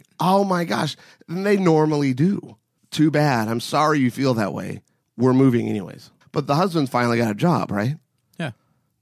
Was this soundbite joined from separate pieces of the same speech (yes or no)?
yes